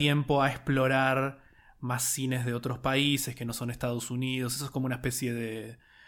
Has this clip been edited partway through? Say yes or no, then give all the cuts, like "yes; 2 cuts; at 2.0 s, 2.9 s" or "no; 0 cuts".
no; 0 cuts